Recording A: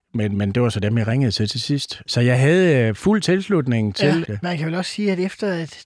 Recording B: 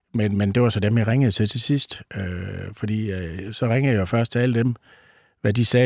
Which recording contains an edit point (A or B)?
A